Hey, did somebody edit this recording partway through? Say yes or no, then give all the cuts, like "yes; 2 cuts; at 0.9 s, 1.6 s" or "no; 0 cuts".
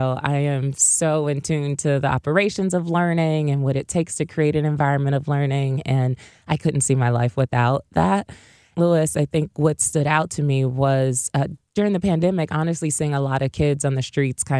yes; 1 cut; at 8.7 s